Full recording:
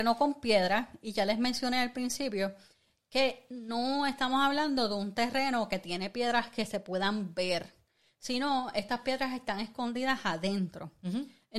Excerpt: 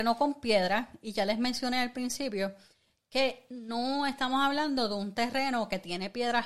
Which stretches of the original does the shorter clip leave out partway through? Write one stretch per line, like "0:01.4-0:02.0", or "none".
none